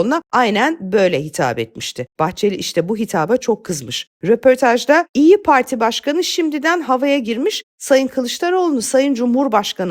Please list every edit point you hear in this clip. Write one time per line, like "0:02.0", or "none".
none